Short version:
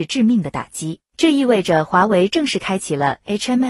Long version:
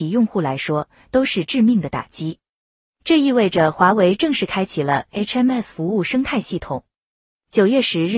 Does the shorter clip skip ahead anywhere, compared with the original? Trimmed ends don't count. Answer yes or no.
yes